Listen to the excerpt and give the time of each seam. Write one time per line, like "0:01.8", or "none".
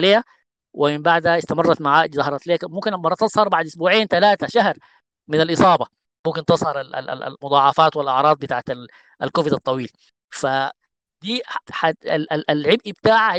0:11.6